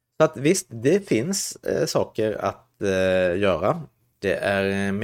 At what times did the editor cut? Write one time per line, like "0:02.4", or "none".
0:04.1